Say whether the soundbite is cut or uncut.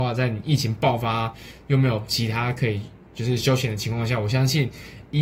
uncut